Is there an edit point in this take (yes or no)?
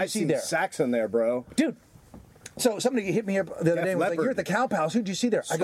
no